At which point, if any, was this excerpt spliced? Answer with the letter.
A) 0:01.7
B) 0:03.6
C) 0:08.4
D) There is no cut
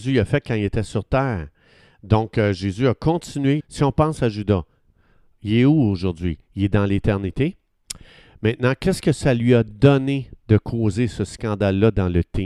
B